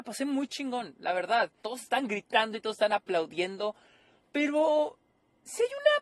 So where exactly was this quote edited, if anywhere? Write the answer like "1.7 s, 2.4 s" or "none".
1.6 s